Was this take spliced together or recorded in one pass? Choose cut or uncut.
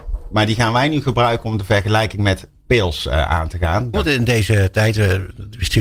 cut